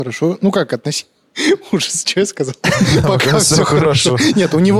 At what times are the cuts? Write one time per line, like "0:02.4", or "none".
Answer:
none